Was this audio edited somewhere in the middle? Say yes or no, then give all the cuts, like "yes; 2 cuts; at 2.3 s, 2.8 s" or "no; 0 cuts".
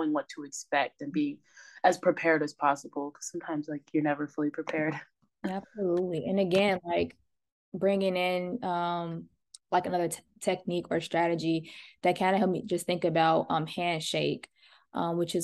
no; 0 cuts